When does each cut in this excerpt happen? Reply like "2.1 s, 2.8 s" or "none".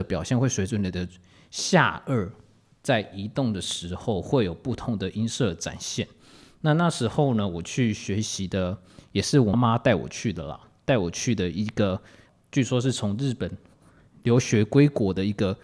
9.5 s